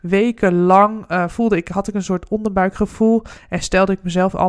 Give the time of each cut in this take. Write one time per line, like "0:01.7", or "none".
none